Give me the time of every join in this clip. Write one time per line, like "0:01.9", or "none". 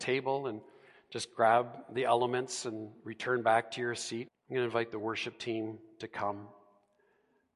0:04.3